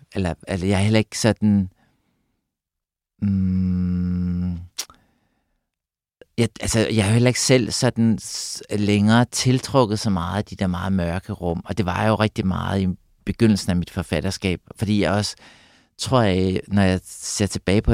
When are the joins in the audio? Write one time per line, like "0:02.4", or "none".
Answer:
none